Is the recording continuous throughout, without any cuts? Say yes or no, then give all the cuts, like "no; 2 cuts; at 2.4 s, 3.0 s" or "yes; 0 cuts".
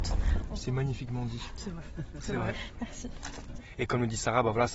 yes; 0 cuts